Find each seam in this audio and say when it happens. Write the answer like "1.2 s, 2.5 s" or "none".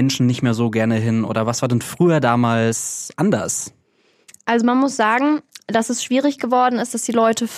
none